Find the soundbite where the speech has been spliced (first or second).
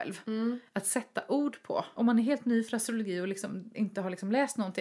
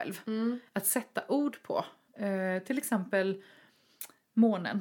first